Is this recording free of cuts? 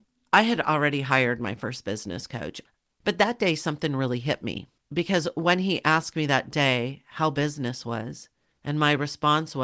no; 1 cut; at 2.9 s

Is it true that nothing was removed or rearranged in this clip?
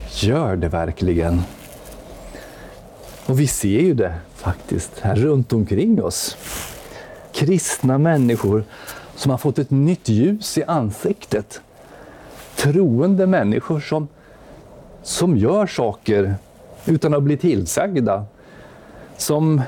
no; 1 cut; at 7.3 s

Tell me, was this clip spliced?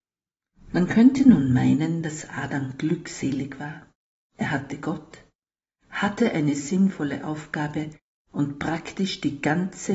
no; 0 cuts

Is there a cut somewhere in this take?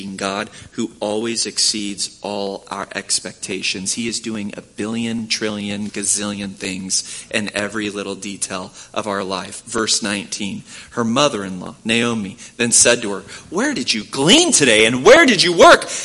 no; 0 cuts

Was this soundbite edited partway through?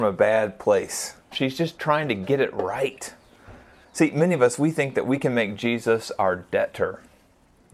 yes; 2 cuts; at 1.3 s, 3.8 s

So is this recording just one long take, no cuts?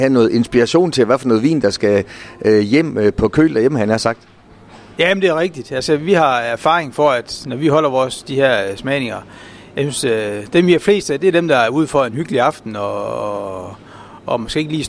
yes; 0 cuts

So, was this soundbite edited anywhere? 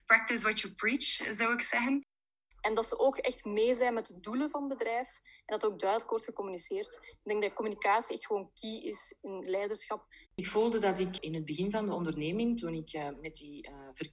yes; 2 cuts; at 2.5 s, 10.2 s

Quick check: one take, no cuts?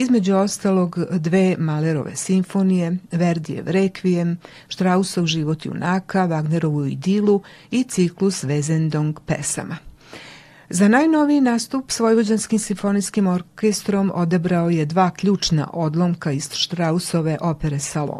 yes; 0 cuts

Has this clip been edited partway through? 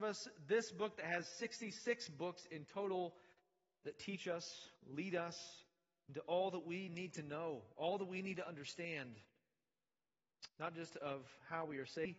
no; 0 cuts

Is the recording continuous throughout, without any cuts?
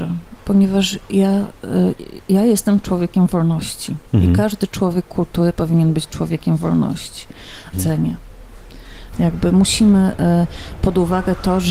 no; 3 cuts; at 7.7 s, 9.1 s, 10.8 s

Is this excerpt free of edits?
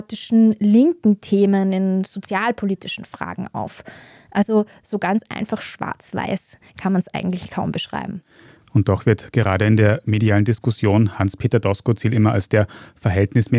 yes; 0 cuts

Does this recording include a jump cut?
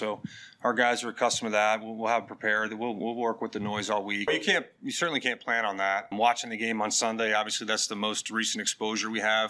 yes; 2 cuts; at 4.3 s, 6.1 s

